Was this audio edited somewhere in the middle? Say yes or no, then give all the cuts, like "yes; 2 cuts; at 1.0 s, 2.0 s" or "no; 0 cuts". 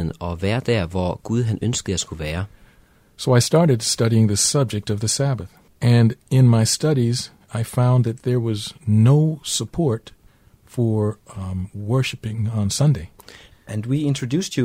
yes; 2 cuts; at 5.7 s, 13.5 s